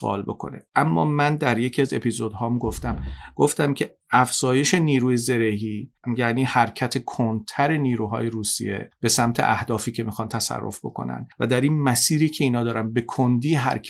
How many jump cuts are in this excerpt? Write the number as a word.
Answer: zero